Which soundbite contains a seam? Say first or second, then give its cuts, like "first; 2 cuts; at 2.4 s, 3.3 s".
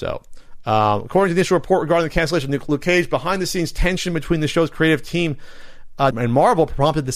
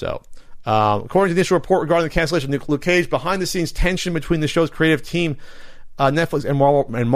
first; 1 cut; at 6.1 s